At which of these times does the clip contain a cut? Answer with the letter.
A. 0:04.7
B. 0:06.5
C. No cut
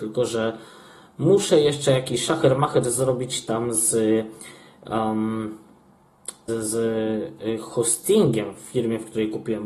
B